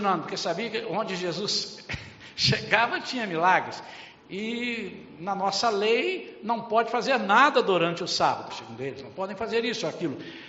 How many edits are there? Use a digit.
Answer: 2